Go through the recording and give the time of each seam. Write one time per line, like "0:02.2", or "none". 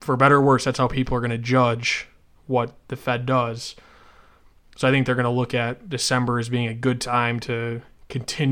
none